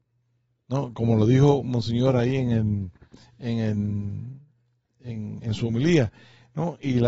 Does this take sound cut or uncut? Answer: uncut